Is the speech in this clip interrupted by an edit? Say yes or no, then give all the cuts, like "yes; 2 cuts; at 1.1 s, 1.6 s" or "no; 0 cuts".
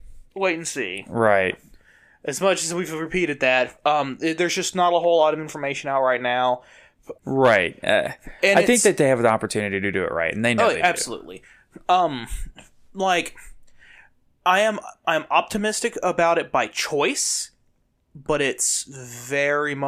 yes; 1 cut; at 7.2 s